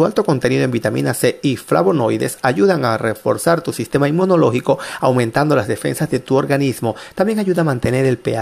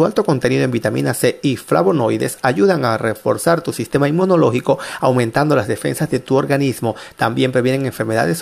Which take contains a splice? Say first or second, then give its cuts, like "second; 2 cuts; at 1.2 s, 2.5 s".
first; 1 cut; at 7.1 s